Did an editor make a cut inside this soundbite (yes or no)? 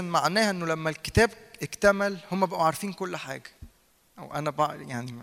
yes